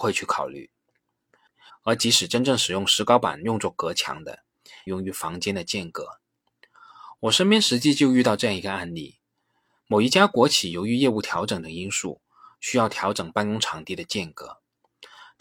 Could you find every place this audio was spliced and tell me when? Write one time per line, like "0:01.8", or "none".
0:01.7
0:04.9